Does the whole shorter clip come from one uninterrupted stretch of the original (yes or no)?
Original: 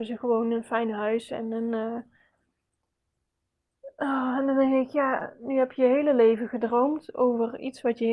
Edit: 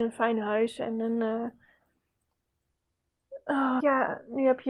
no